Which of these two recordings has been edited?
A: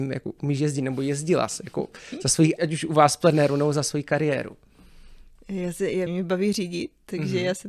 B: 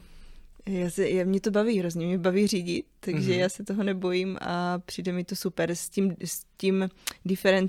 A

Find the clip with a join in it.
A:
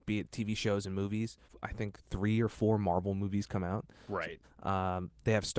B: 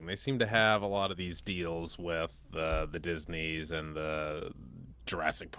A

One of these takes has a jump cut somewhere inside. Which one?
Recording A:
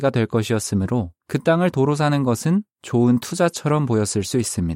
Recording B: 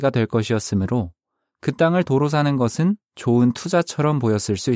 A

